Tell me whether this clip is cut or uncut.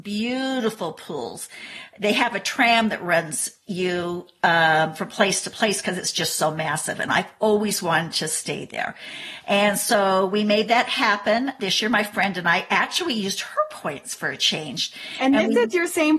uncut